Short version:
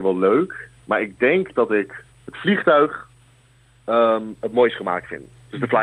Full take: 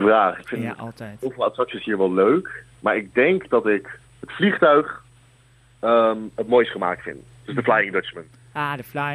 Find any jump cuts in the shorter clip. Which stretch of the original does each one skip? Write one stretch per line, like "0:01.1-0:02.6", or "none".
none